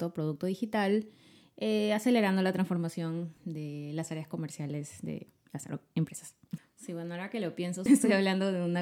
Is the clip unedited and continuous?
no; 3 cuts; at 3.4 s, 6.6 s, 7.9 s

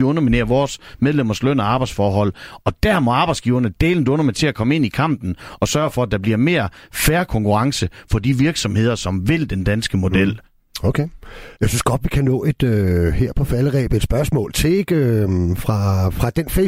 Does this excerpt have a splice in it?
yes; 1 cut; at 11.6 s

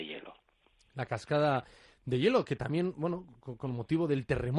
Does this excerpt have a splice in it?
no; 0 cuts

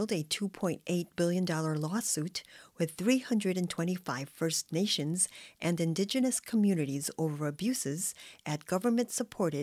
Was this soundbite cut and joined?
no; 0 cuts

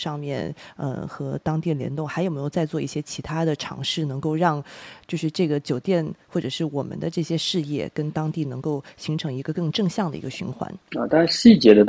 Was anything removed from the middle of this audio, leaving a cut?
yes; 1 cut; at 10.8 s

